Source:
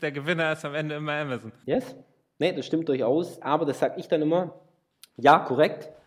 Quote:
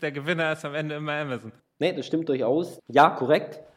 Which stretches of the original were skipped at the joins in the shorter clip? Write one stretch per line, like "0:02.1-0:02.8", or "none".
0:01.6-0:02.2
0:03.4-0:05.1